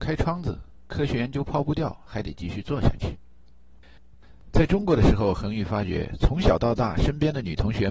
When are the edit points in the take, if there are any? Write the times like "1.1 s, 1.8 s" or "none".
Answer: none